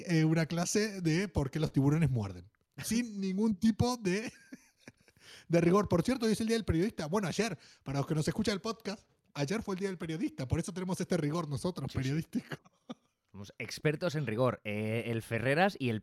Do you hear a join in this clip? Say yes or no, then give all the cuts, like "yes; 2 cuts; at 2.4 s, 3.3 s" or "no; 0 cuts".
no; 0 cuts